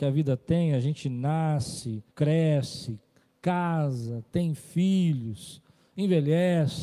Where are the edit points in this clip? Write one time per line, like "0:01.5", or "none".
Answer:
0:02.1